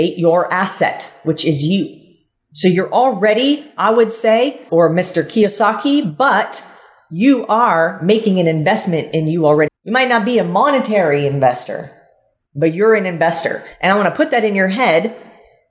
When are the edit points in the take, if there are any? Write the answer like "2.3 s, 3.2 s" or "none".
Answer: 4.7 s, 9.7 s